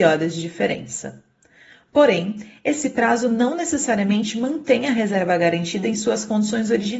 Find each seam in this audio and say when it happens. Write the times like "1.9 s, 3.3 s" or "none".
none